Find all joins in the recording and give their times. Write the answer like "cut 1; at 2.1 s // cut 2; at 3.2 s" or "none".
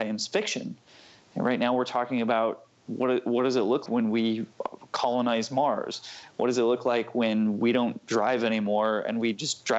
cut 1; at 3.9 s